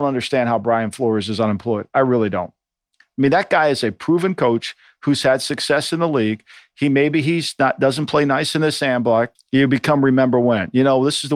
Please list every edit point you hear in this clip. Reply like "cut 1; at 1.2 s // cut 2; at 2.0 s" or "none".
cut 1; at 9.4 s